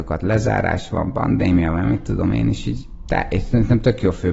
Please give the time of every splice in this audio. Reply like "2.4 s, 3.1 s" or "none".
none